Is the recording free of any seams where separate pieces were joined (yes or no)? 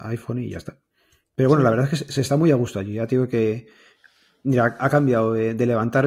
yes